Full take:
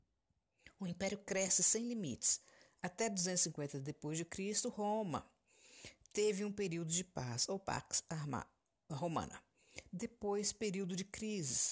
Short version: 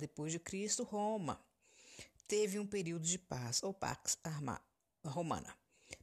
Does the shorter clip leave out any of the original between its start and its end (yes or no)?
no